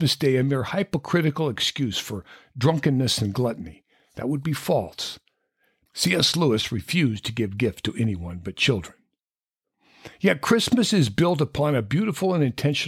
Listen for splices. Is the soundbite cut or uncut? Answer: cut